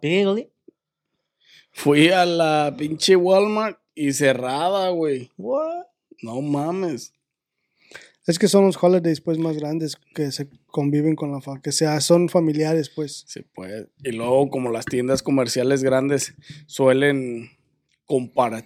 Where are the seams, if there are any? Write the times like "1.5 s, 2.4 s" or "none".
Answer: none